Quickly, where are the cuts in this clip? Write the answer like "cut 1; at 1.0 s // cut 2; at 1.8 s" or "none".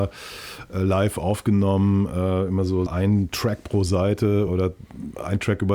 cut 1; at 2.9 s // cut 2; at 4.5 s